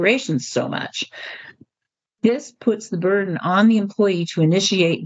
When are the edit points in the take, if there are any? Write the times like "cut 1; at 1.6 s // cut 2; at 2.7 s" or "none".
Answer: none